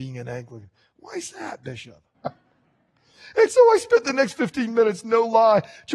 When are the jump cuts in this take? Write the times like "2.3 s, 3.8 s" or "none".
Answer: 2.1 s